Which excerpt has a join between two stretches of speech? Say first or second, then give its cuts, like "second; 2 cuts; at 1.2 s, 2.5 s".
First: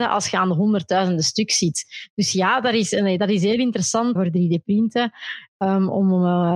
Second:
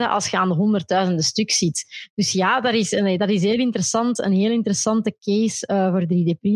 first; 1 cut; at 4.2 s